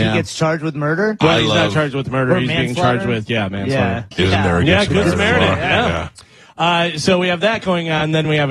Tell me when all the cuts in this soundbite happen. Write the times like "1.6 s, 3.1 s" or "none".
4.1 s